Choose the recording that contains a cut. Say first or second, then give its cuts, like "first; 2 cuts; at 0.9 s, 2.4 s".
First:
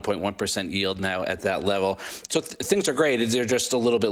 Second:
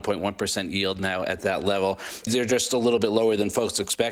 second; 1 cut; at 2.3 s